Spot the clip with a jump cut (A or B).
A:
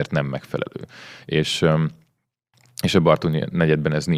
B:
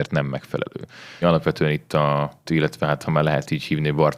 B